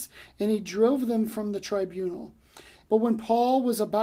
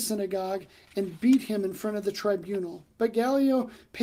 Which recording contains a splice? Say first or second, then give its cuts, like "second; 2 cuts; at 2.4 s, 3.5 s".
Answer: first; 1 cut; at 2.9 s